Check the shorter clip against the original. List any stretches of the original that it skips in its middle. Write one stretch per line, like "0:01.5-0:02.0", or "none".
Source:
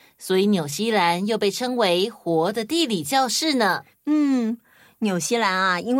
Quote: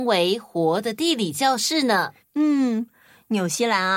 none